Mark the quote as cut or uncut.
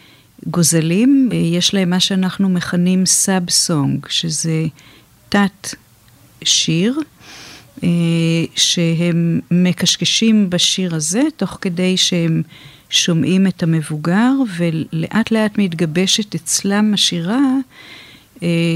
cut